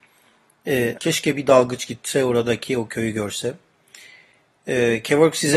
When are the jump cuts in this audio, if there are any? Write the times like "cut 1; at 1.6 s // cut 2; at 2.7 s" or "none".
cut 1; at 1.0 s